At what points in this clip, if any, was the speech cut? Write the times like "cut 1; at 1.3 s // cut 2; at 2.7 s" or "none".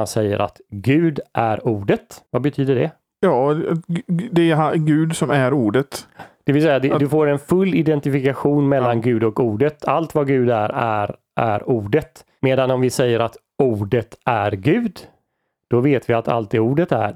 cut 1; at 2.3 s